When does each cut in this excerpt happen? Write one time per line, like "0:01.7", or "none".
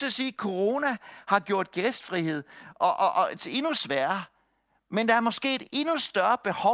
none